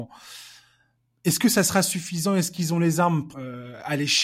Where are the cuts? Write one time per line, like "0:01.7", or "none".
0:03.3